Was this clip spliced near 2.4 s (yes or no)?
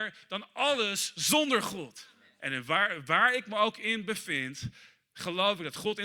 yes